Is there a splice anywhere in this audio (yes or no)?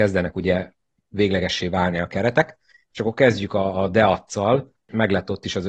no